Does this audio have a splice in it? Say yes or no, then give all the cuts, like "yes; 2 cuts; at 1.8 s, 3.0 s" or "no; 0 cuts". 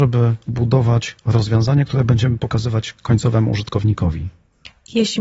no; 0 cuts